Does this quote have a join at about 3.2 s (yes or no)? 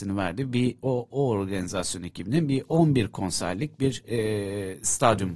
no